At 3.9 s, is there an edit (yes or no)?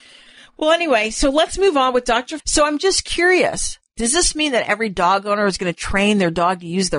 no